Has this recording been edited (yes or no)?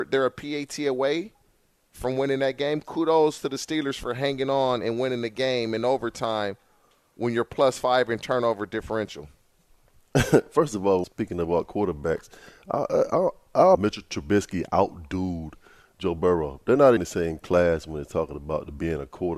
yes